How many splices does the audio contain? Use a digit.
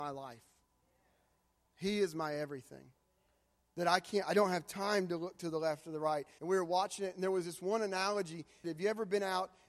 2